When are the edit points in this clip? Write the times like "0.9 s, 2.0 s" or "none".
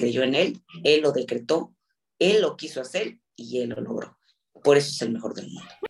none